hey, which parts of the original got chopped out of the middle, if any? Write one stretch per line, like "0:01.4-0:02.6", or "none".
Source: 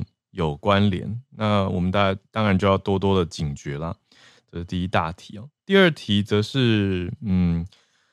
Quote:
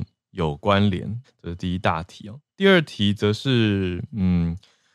0:01.2-0:04.3